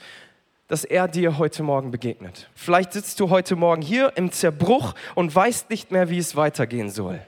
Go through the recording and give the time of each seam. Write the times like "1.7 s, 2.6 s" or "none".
2.5 s